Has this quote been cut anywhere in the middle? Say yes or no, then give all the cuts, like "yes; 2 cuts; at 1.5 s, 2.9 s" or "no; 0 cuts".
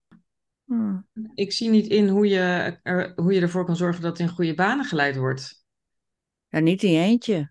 yes; 1 cut; at 1.2 s